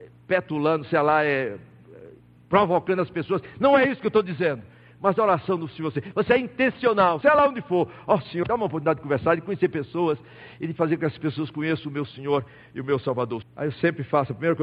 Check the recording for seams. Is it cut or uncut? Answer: cut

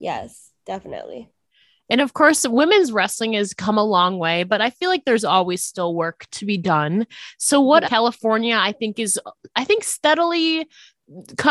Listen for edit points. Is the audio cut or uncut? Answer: cut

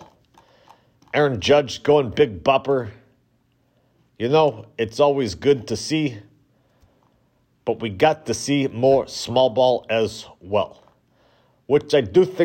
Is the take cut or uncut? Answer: uncut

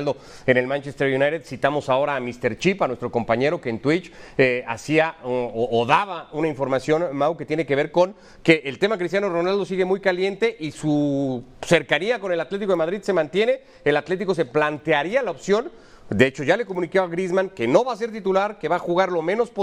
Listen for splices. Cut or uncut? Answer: uncut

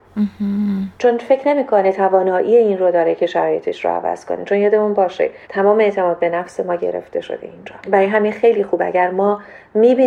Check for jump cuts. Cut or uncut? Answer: cut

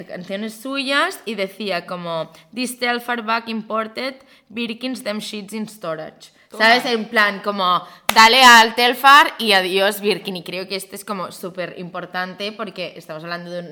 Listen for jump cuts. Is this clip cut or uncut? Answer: uncut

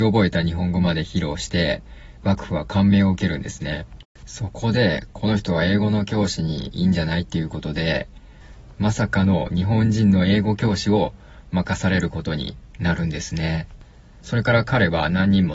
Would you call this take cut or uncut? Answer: cut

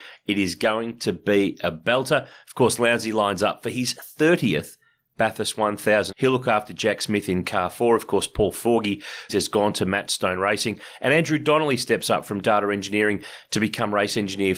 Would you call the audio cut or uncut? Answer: cut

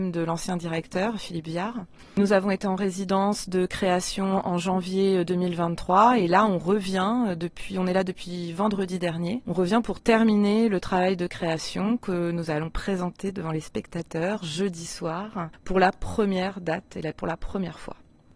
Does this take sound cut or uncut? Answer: uncut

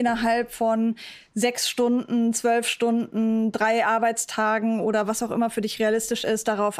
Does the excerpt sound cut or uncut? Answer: uncut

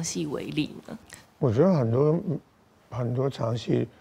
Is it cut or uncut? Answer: cut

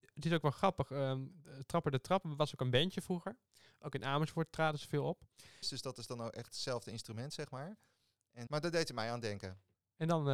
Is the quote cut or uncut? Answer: cut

